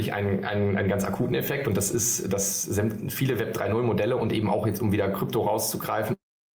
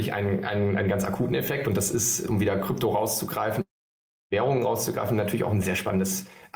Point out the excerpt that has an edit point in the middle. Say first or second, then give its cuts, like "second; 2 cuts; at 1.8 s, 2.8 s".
second; 2 cuts; at 2.3 s, 5.6 s